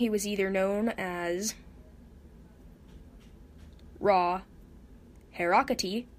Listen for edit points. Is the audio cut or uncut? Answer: uncut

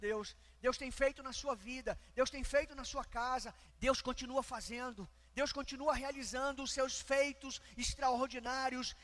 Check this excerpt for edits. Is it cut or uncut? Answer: cut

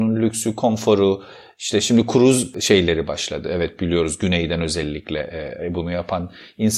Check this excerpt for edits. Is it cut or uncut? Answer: uncut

